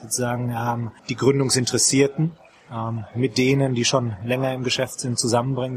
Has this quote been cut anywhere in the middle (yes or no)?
yes